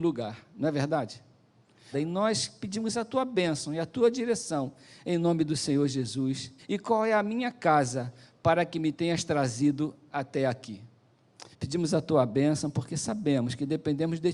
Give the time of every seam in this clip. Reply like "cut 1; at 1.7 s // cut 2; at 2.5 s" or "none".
cut 1; at 1.9 s // cut 2; at 6.6 s // cut 3; at 11.5 s